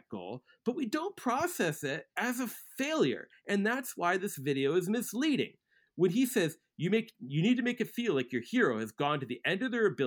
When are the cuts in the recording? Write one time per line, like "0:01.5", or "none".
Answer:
0:02.1